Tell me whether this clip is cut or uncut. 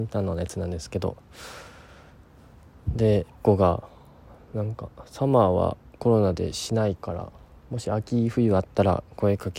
cut